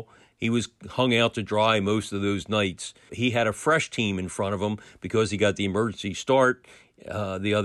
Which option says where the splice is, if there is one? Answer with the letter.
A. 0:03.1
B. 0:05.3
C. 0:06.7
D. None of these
A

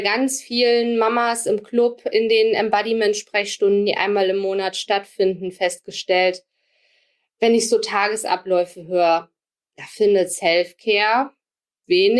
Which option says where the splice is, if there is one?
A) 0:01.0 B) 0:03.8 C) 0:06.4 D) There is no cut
D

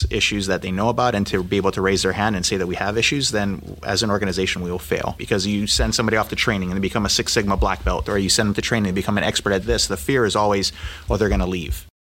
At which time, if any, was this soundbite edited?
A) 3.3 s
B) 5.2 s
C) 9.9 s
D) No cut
B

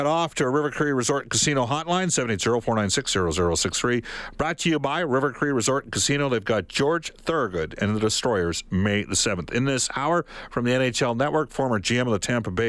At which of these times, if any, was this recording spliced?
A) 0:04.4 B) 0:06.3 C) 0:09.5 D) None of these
D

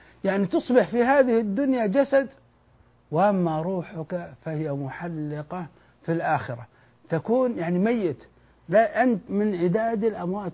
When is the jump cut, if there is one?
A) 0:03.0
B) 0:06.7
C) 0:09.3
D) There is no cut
C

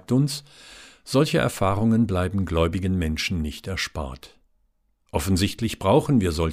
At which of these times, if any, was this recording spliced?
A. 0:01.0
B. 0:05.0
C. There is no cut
C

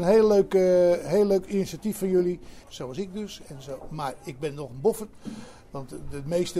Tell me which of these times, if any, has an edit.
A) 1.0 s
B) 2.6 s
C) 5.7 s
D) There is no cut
B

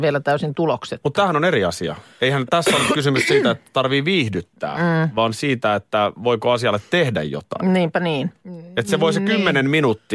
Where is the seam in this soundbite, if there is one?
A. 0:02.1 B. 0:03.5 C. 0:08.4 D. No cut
C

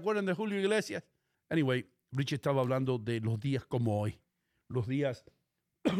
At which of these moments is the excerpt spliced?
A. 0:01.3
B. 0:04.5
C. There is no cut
A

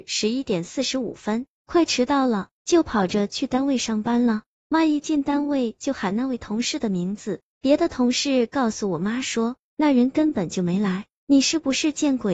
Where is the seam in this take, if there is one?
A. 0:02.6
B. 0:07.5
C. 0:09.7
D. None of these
A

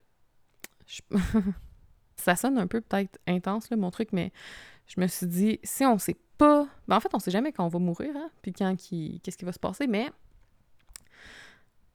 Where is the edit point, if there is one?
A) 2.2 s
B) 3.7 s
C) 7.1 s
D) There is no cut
A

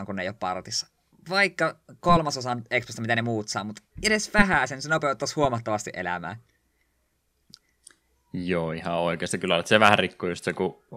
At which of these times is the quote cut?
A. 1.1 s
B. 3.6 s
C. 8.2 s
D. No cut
D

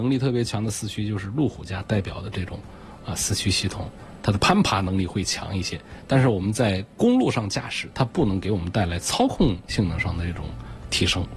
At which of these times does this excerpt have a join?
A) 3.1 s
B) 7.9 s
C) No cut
B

